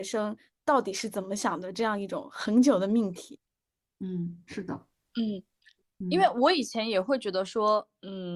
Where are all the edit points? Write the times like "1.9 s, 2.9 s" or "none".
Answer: none